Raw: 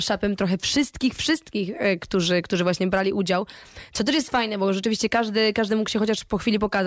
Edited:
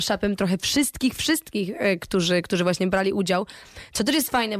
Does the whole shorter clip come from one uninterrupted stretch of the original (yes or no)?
yes